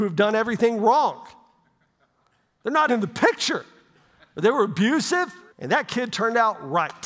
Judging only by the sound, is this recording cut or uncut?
cut